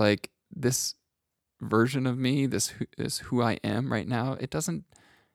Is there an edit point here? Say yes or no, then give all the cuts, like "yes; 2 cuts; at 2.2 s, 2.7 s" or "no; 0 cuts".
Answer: no; 0 cuts